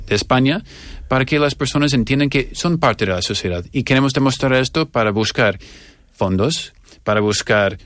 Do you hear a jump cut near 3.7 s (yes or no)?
no